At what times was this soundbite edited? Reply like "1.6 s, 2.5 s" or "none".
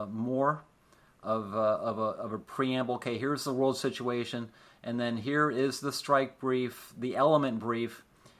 none

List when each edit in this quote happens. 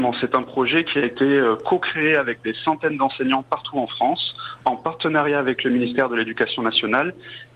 none

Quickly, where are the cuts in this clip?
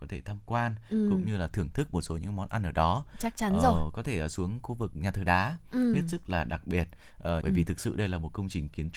5.9 s, 7.4 s

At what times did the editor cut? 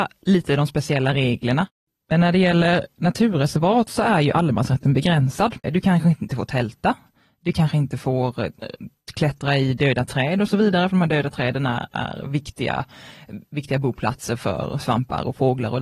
5.6 s

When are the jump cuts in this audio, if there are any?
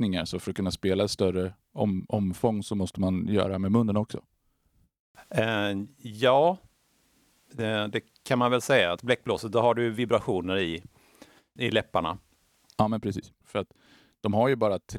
9.0 s, 11.6 s, 13.4 s

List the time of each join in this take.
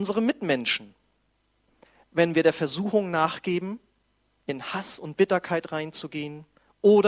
none

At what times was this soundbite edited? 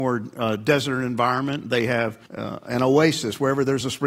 2.3 s

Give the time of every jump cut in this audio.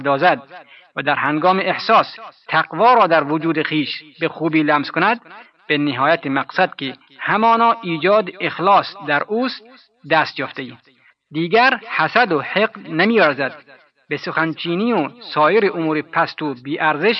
11.1 s

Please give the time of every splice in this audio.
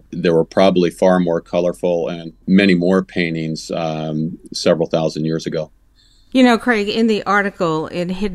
none

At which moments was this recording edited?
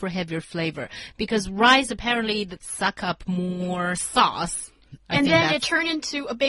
2.6 s

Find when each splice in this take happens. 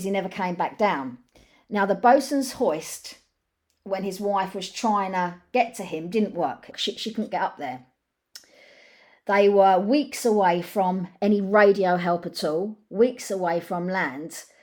6.7 s

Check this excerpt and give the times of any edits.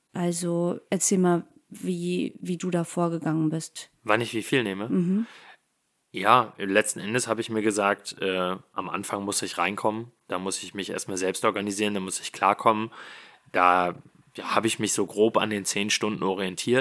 4.0 s

